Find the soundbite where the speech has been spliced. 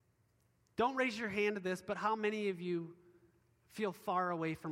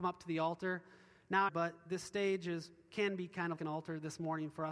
second; 2 cuts; at 1.5 s, 3.6 s

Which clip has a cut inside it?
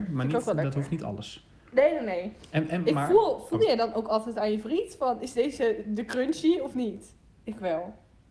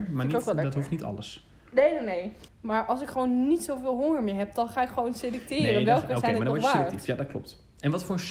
second; 1 cut; at 2.5 s

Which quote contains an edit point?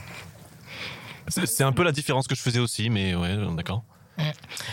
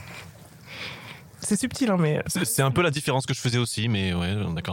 first; 1 cut; at 1.3 s

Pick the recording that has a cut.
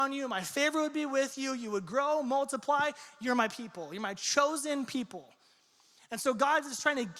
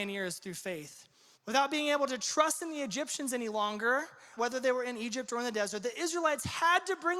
second; 2 cuts; at 1.3 s, 4.4 s

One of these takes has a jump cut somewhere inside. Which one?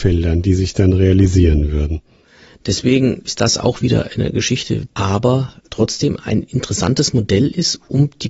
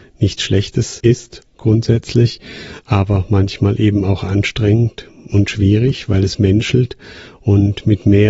first; 1 cut; at 4.9 s

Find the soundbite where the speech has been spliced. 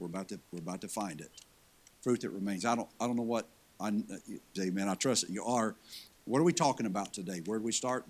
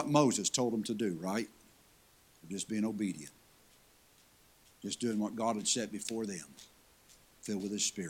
first; 3 cuts; at 1.9 s, 4.6 s, 6.1 s

